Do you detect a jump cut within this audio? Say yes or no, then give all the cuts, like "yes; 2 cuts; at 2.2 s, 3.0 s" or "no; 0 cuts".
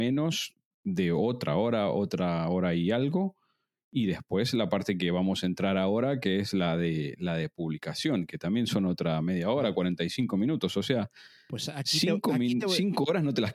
no; 0 cuts